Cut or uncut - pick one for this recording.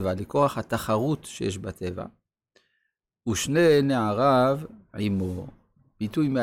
uncut